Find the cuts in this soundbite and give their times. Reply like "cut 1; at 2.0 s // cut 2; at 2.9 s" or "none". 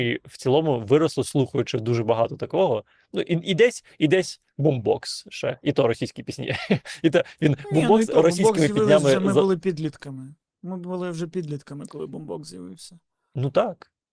none

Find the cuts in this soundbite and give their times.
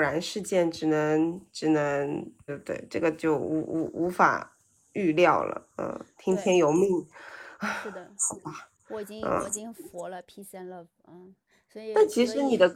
cut 1; at 2.5 s

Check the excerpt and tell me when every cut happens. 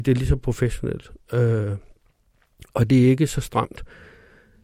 none

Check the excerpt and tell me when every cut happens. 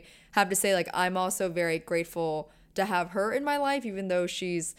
none

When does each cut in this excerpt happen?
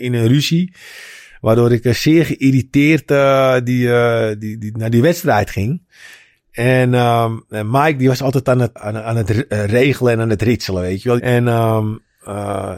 cut 1; at 8.8 s // cut 2; at 11.2 s

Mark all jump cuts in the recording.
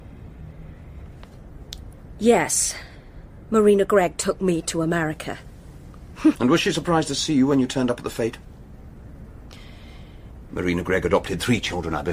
cut 1; at 6.4 s // cut 2; at 10.5 s

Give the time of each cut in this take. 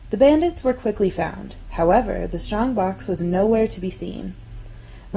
none

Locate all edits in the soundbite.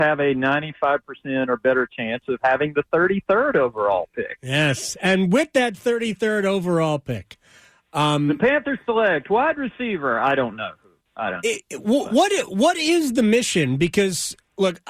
none

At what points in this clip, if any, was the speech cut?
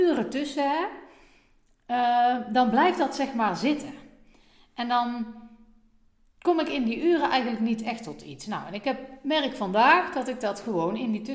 none

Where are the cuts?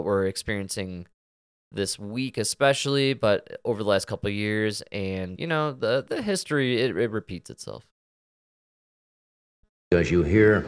cut 1; at 5.4 s

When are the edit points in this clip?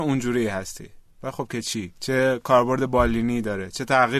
cut 1; at 2.0 s

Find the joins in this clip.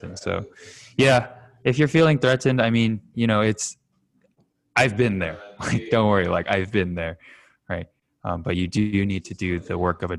none

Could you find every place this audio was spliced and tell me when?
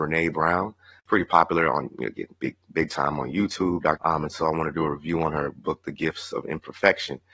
cut 1; at 4.0 s

